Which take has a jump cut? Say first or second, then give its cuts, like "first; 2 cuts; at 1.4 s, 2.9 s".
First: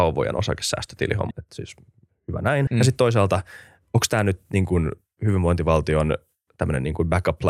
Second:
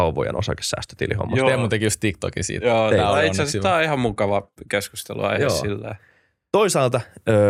first; 2 cuts; at 1.3 s, 2.7 s